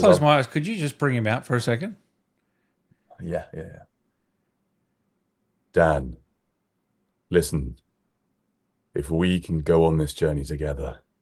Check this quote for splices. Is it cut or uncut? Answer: uncut